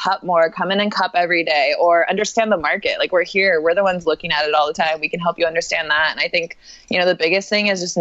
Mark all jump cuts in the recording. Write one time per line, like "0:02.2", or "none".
none